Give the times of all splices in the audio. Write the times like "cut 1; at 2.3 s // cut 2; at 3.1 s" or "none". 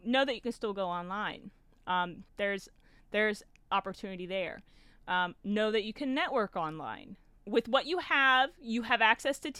cut 1; at 2.3 s // cut 2; at 7.4 s